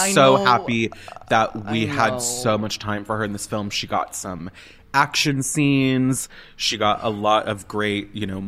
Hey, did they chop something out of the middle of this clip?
no; 0 cuts

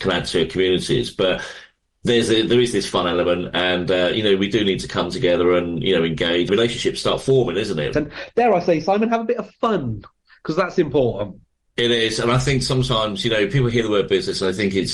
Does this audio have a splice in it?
yes; 2 cuts; at 6.5 s, 7.9 s

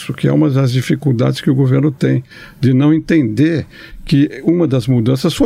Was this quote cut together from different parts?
no; 0 cuts

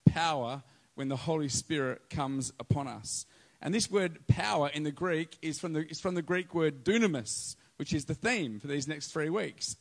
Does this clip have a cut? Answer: no; 0 cuts

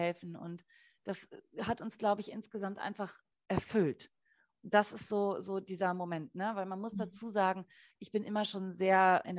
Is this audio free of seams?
yes; 0 cuts

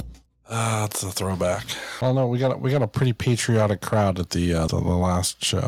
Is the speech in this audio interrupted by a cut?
yes; 2 cuts; at 2.0 s, 4.7 s

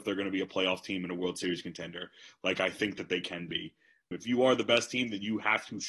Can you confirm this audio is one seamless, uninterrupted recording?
no; 1 cut; at 4.1 s

